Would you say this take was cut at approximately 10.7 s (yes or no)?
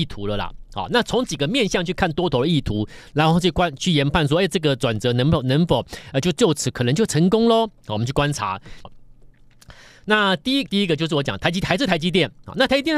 yes